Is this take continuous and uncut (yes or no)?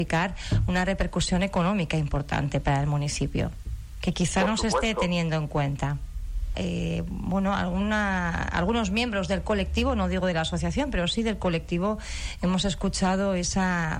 no